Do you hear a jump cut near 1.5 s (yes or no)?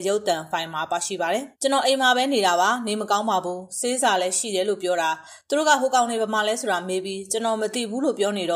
yes